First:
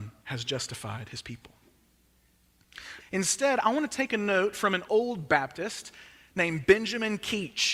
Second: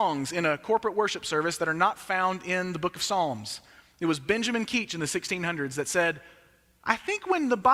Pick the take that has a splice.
first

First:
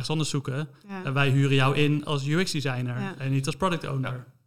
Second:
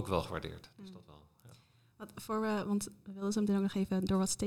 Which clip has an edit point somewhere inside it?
first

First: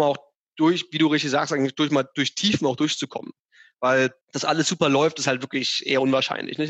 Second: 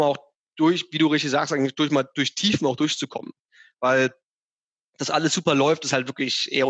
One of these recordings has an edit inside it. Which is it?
first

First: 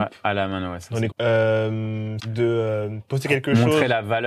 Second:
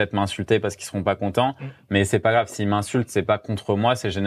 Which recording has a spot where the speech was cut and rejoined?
first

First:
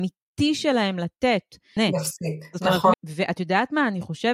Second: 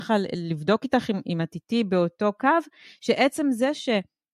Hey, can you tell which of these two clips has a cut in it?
first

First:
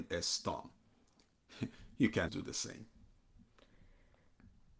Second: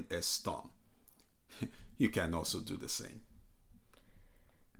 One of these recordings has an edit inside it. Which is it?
first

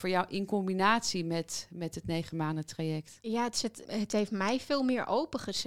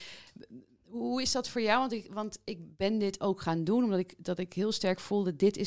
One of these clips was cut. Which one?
first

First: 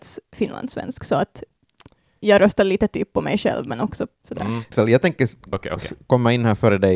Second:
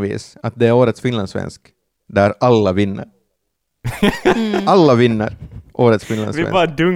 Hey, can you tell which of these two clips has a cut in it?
first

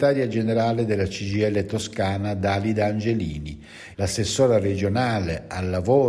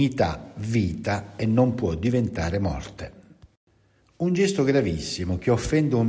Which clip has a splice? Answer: first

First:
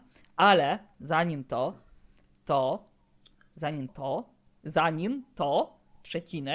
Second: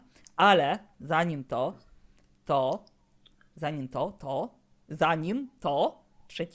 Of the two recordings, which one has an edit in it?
first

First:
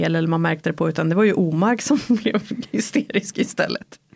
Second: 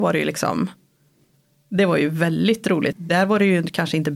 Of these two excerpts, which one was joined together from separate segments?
second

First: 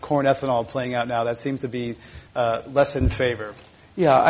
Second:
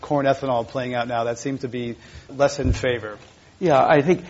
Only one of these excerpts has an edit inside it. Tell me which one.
second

